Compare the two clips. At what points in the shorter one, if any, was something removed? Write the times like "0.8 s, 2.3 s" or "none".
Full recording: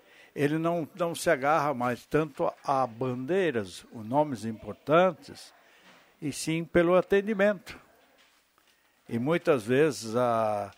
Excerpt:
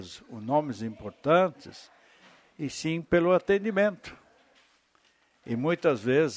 none